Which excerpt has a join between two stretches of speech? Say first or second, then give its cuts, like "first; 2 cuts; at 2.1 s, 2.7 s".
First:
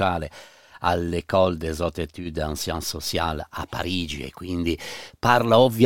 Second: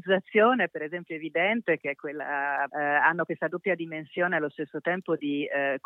second; 1 cut; at 2.7 s